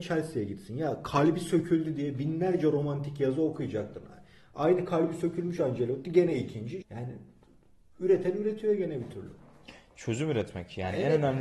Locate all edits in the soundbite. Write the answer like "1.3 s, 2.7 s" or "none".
6.8 s